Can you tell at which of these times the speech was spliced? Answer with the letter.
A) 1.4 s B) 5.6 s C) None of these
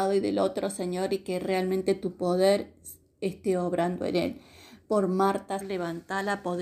B